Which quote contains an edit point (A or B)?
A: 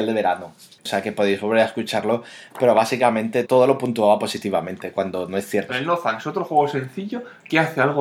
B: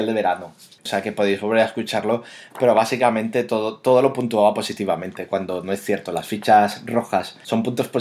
A